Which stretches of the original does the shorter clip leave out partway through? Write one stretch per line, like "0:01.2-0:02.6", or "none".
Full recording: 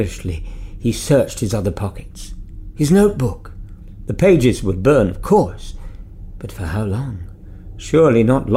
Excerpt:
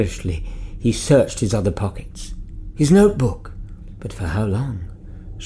0:04.0-0:06.4